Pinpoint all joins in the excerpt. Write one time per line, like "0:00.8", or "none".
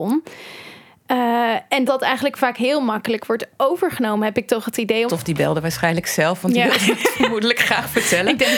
0:01.9
0:05.1